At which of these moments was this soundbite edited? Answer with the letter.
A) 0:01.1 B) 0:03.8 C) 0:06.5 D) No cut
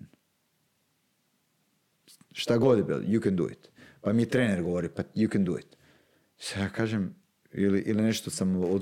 D